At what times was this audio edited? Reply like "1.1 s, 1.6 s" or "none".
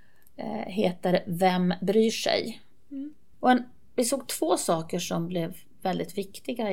3.3 s

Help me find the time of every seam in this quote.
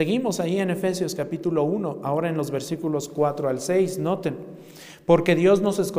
none

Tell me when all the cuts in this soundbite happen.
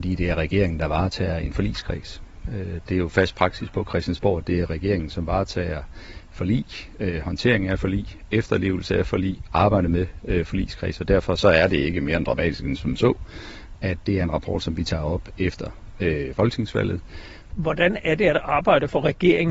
17.5 s

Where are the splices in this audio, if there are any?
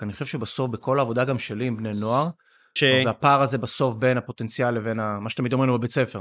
2.8 s

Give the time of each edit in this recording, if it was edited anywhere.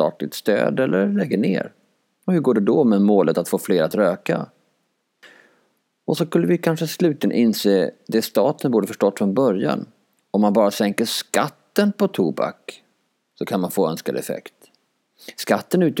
none

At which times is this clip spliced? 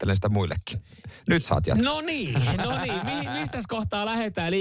none

